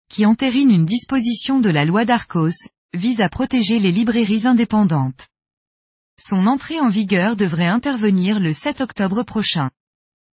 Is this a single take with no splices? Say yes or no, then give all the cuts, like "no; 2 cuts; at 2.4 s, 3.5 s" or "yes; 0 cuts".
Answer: yes; 0 cuts